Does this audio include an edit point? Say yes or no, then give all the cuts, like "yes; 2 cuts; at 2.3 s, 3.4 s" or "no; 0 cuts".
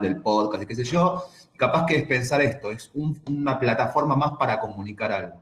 no; 0 cuts